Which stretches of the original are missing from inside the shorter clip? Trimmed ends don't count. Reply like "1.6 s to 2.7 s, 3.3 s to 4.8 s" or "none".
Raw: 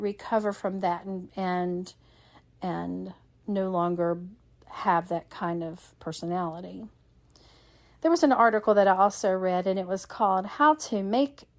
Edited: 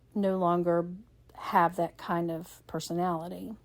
none

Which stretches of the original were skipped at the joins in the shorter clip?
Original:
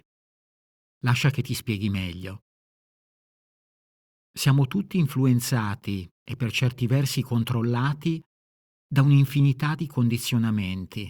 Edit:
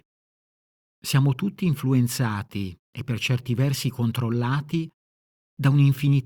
0.9 s to 4.3 s

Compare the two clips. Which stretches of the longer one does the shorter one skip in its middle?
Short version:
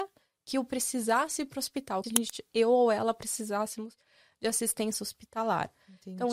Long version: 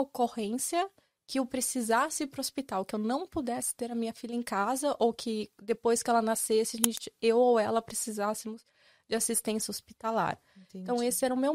2.9 s to 6.7 s

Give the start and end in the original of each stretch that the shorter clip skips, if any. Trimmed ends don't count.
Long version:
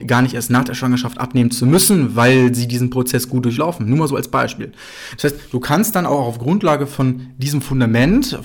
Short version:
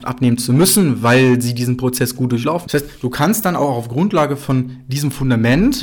3.8 s to 5.2 s

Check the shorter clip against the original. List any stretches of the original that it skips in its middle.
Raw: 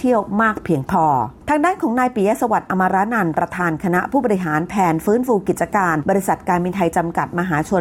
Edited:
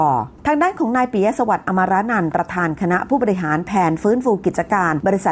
none

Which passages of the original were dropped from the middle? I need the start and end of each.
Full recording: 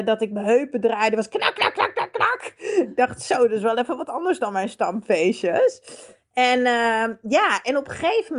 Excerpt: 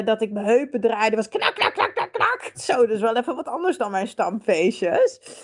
2.5 s to 3.2 s

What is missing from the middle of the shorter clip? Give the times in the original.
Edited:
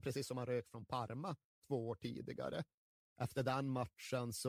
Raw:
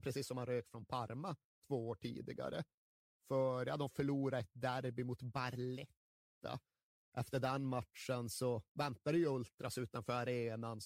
3.0 s to 7.0 s

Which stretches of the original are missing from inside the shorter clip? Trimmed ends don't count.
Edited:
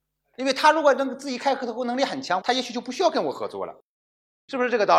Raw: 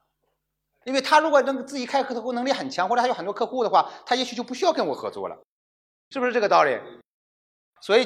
2.9 s to 4.0 s

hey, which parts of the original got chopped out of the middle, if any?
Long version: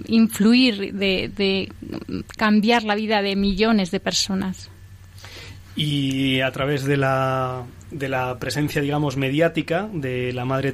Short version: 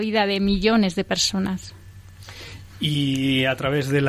none

